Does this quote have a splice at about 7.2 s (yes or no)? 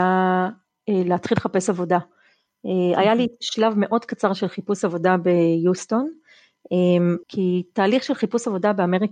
yes